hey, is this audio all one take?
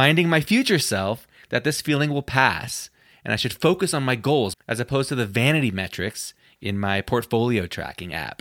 no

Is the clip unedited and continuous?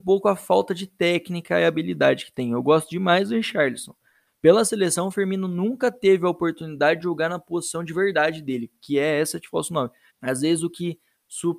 no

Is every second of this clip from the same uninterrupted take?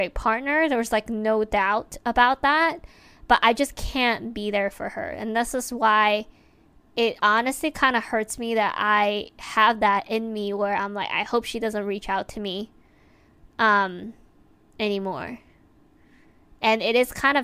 yes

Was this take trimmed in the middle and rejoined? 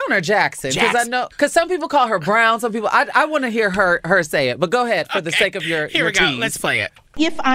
yes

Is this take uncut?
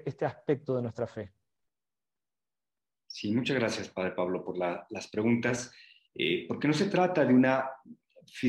no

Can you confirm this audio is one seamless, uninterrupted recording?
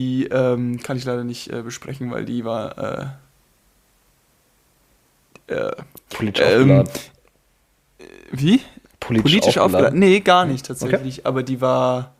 yes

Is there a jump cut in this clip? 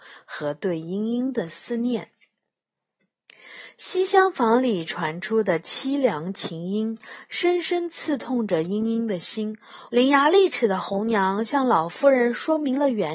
yes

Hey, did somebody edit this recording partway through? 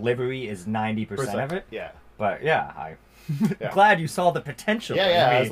no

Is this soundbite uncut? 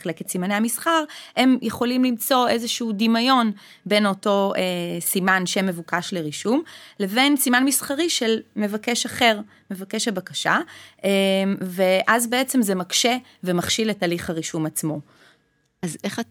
yes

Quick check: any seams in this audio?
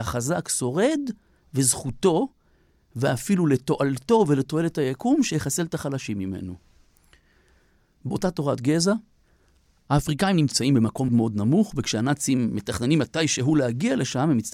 yes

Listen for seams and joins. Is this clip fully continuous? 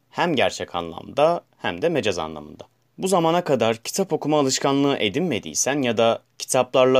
yes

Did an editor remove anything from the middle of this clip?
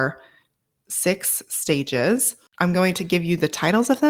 no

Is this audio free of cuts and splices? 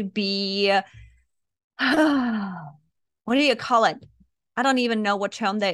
yes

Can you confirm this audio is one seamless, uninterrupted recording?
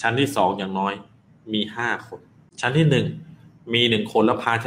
yes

